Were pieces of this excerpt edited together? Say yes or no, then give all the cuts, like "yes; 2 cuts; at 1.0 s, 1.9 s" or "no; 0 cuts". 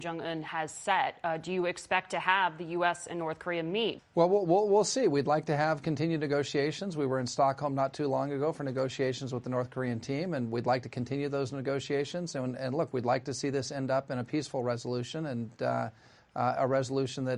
yes; 1 cut; at 4.0 s